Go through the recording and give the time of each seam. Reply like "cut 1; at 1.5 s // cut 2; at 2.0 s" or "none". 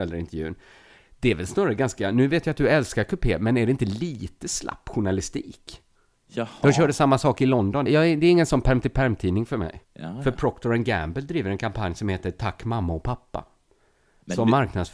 cut 1; at 6.1 s // cut 2; at 7.9 s // cut 3; at 9.8 s